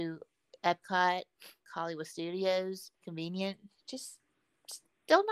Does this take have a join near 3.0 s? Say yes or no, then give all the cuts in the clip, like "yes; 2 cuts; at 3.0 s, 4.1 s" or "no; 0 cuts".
yes; 2 cuts; at 1.6 s, 3.0 s